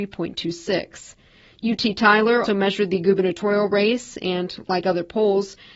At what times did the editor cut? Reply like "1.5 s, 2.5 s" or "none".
2.4 s